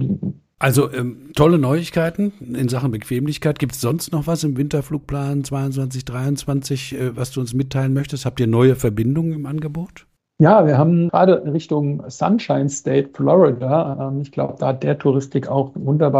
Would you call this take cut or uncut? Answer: uncut